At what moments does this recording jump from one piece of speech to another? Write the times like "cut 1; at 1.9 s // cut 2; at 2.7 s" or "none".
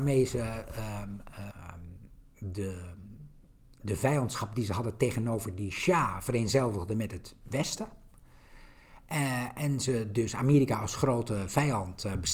cut 1; at 1.5 s